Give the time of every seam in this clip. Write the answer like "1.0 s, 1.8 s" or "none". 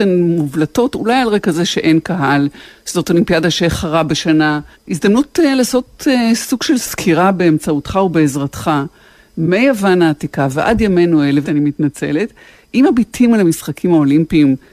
4.7 s, 11.4 s